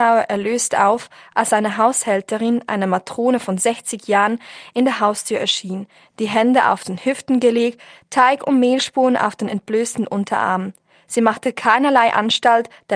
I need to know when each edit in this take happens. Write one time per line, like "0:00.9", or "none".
none